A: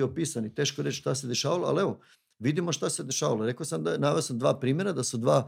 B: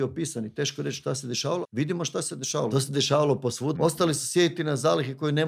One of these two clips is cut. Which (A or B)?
B